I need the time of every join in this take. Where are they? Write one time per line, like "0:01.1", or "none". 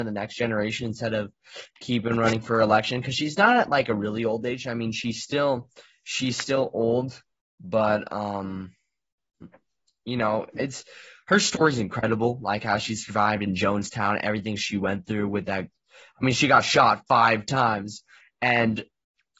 none